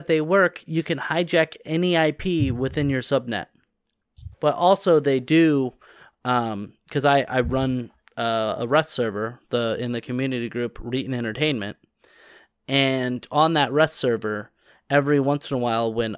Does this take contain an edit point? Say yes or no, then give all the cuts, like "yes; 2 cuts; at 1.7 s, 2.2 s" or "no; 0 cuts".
yes; 1 cut; at 4.3 s